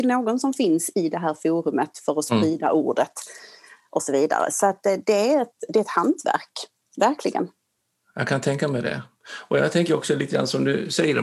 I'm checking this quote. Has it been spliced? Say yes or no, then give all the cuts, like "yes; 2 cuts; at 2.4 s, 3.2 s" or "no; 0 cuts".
no; 0 cuts